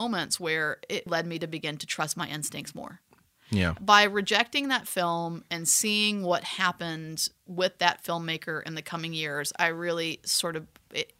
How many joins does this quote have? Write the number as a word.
one